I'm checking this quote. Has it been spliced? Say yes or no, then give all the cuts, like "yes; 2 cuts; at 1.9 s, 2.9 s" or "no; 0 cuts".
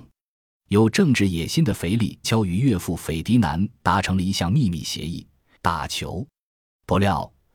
yes; 2 cuts; at 2.2 s, 5.6 s